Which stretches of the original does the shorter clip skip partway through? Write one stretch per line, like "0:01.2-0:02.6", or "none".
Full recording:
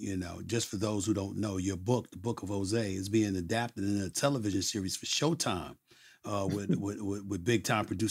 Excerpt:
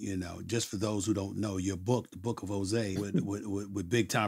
0:03.0-0:06.5